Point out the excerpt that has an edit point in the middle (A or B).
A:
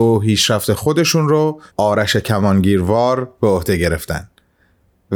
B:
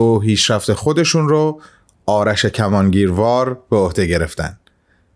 A